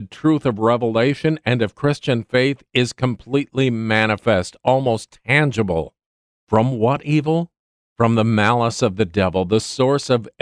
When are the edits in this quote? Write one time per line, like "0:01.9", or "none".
0:06.3